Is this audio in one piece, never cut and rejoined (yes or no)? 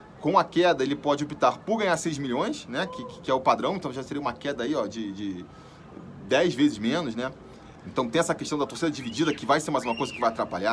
no